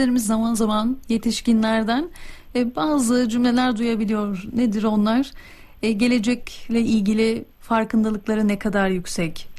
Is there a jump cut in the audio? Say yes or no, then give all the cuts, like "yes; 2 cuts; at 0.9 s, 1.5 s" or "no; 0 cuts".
no; 0 cuts